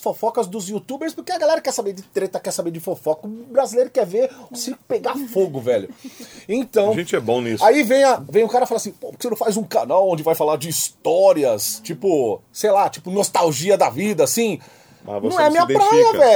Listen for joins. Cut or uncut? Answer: uncut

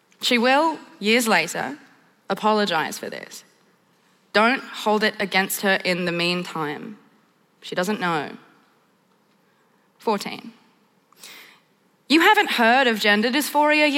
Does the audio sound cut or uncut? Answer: uncut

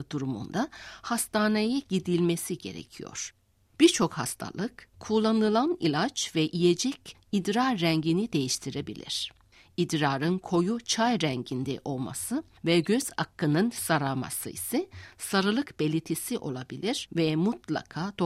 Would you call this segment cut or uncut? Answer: uncut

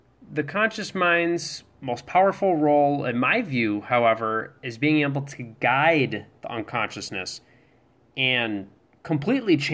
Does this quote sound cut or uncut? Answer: uncut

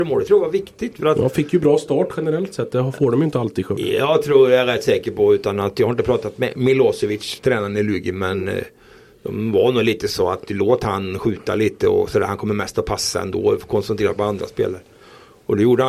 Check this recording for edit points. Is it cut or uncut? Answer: uncut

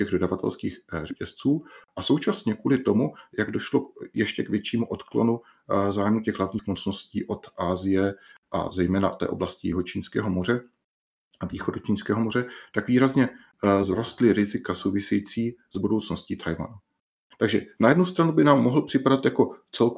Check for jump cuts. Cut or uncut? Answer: uncut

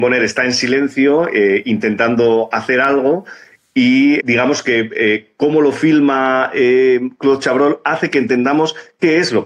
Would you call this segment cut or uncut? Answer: cut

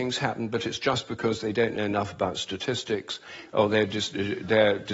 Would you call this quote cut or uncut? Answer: uncut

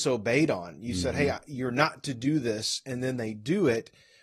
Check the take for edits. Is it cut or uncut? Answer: uncut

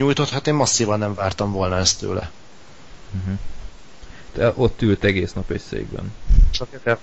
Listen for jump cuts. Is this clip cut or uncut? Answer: cut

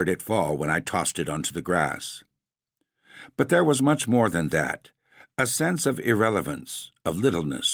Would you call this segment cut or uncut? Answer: uncut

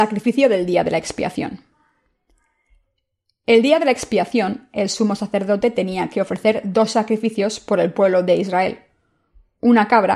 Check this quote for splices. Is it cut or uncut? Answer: uncut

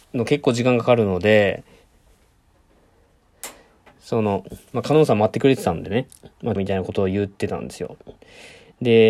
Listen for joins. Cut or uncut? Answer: cut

